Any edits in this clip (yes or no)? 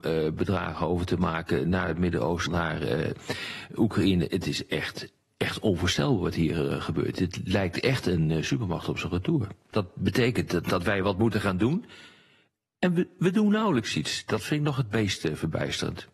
yes